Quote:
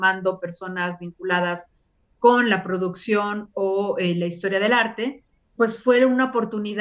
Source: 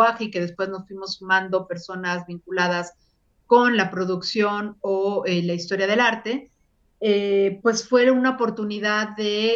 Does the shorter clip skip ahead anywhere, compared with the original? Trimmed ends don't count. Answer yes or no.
yes